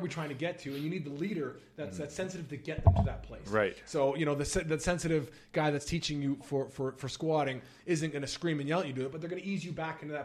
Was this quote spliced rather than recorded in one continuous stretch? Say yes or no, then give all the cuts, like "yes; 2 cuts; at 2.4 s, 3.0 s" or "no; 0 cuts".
no; 0 cuts